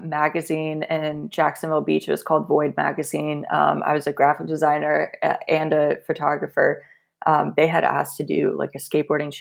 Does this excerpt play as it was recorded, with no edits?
yes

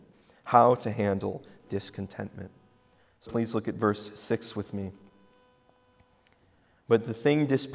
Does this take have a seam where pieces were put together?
yes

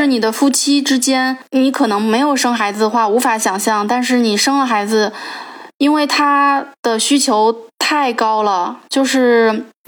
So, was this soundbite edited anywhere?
no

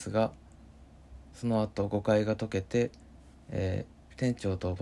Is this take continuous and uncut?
no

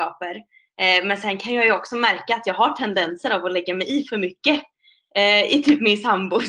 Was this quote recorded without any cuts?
yes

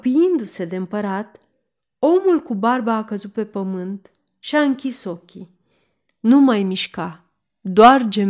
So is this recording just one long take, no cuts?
yes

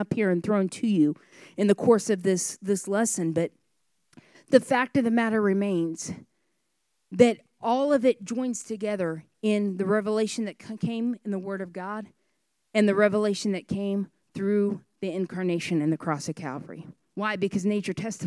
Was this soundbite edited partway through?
yes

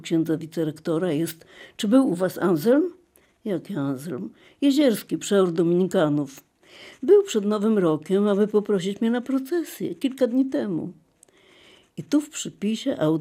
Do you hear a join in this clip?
no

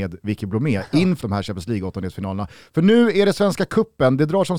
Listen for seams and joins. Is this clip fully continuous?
no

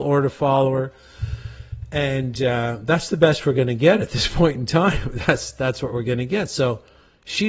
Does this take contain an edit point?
no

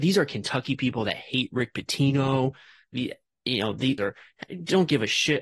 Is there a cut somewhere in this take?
yes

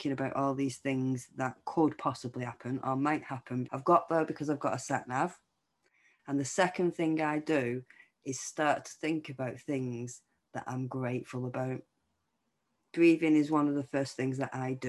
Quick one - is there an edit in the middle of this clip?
yes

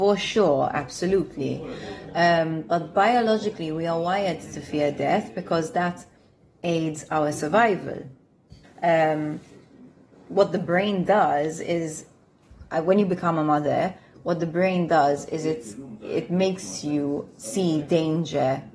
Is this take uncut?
no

